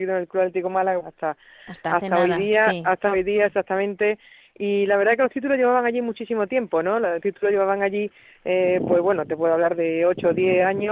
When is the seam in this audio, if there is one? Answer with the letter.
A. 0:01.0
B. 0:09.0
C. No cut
A